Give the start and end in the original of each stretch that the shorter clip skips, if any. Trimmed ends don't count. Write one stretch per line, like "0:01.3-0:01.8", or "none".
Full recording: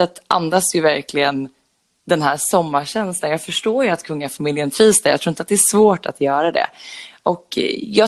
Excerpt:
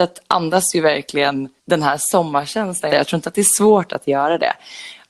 0:01.6-0:02.0
0:03.3-0:05.0